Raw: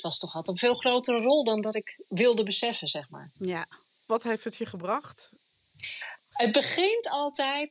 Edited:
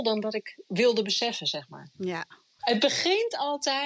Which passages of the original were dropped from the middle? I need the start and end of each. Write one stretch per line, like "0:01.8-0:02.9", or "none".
0:03.9-0:06.2